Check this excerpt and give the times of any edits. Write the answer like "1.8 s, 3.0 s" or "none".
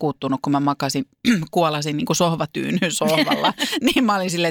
none